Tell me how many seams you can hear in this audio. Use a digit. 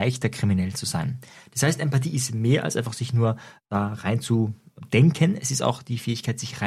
0